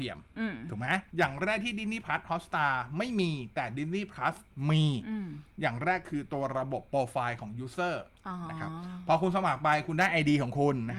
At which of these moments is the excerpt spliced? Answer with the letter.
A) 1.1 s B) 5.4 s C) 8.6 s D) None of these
A